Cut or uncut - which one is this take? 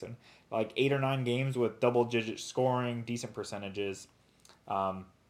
uncut